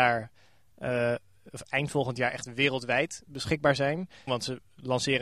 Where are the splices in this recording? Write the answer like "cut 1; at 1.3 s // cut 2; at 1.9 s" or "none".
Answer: cut 1; at 4.3 s